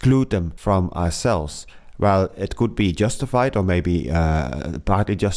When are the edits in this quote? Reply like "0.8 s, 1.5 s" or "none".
none